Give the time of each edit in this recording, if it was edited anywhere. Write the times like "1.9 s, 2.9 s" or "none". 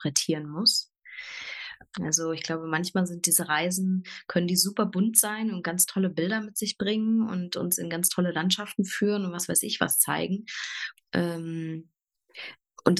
1.9 s, 11.0 s